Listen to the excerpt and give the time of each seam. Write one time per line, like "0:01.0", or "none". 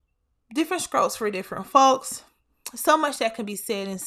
none